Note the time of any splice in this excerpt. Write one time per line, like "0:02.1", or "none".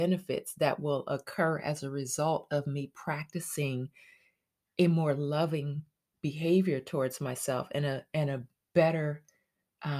none